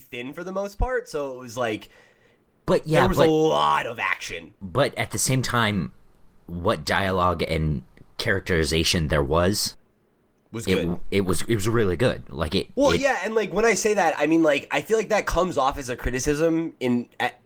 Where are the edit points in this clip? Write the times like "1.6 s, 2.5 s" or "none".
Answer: none